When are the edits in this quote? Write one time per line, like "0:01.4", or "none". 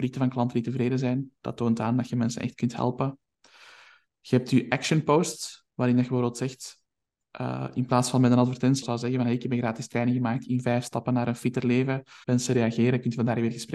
0:08.8
0:12.2